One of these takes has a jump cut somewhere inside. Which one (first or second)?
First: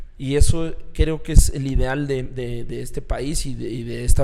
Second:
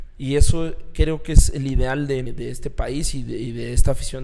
second